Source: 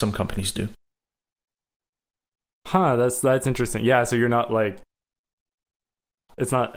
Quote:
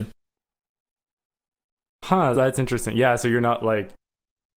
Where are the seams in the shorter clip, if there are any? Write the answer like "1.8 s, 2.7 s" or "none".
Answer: 2.3 s

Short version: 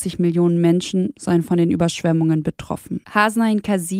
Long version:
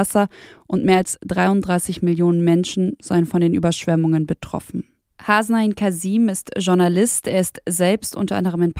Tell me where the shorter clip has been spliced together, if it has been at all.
3.0 s

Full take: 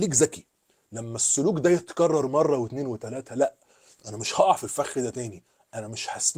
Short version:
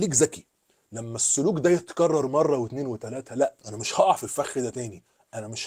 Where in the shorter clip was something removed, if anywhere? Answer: 3.6 s

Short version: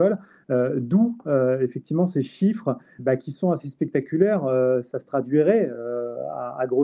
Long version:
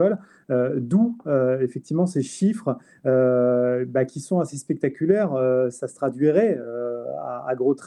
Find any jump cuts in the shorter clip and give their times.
3.0 s

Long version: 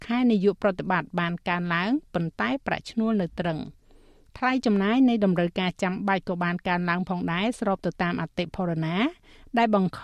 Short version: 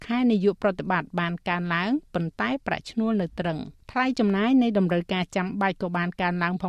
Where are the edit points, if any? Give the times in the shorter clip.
3.8 s

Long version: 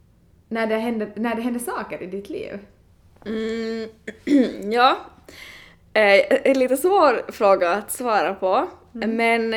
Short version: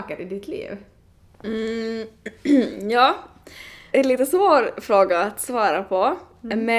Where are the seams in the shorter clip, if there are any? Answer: 3.9 s

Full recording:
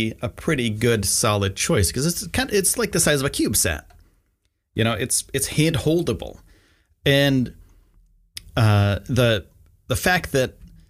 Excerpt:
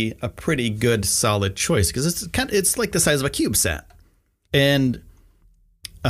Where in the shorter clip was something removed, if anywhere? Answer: 4.5 s

